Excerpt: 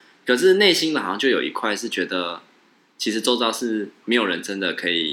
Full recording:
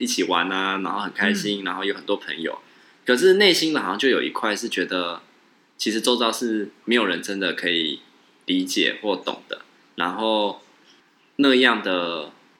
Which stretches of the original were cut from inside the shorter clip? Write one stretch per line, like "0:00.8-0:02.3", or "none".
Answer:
none